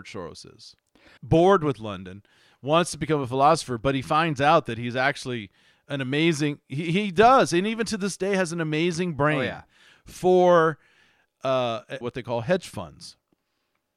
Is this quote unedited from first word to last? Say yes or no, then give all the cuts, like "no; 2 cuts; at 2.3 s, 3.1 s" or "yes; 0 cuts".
no; 2 cuts; at 1.2 s, 12.0 s